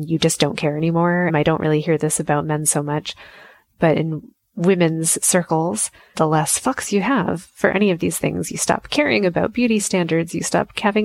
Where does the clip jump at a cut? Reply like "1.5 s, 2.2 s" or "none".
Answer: 1.3 s, 6.1 s